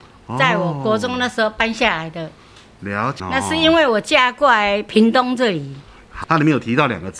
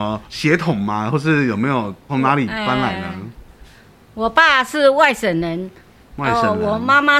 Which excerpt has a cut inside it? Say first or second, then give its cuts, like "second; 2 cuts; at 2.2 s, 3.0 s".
first; 2 cuts; at 3.2 s, 6.2 s